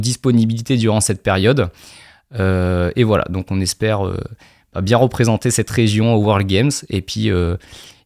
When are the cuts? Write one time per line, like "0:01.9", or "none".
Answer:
none